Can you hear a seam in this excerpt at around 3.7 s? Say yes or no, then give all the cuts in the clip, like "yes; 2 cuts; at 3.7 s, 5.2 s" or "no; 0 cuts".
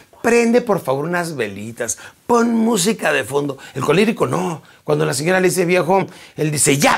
no; 1 cut; at 6.0 s